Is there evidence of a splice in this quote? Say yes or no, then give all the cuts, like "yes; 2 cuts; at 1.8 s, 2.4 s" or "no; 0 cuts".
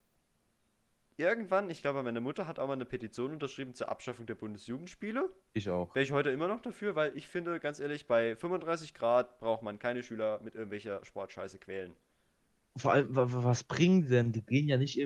yes; 1 cut; at 5.5 s